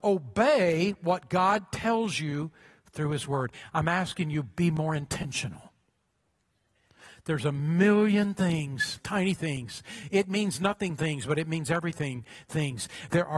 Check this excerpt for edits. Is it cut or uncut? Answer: cut